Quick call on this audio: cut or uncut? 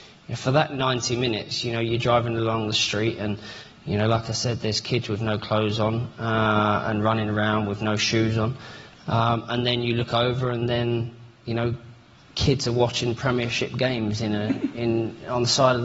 uncut